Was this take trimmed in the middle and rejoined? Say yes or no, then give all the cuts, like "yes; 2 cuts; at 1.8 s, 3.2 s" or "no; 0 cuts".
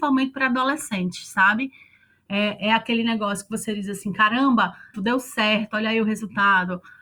yes; 1 cut; at 4.9 s